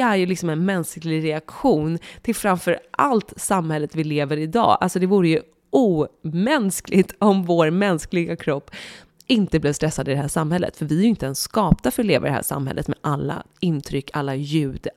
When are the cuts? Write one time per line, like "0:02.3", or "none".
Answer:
none